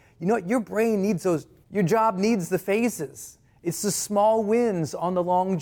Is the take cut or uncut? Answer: cut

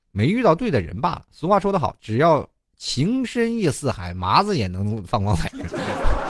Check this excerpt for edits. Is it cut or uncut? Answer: uncut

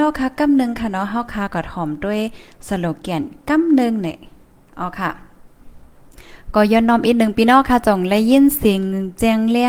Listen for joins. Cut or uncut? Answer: uncut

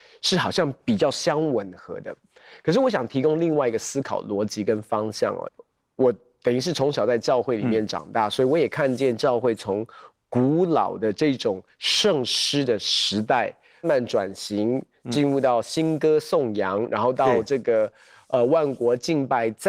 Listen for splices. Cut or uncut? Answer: cut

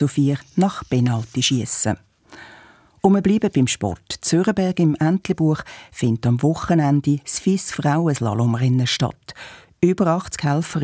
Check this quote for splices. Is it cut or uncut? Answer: uncut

